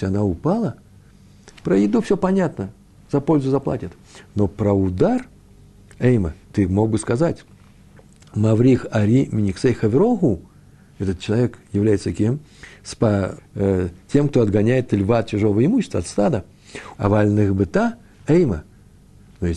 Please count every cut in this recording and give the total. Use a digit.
2